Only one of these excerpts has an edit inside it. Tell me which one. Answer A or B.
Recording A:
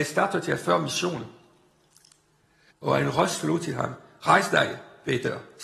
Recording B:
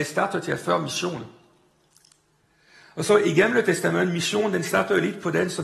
A